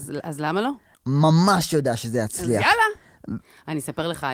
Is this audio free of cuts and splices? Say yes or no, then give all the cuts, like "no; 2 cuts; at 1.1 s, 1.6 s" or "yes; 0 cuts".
no; 2 cuts; at 0.9 s, 3.4 s